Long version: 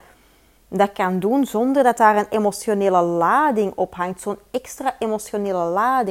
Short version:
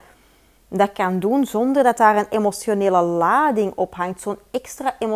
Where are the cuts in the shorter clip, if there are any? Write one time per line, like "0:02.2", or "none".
none